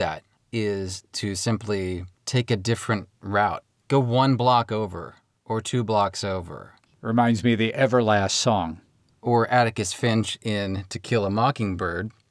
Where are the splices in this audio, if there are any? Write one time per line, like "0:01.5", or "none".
0:02.2
0:06.9